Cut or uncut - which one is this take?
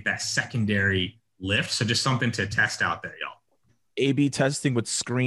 cut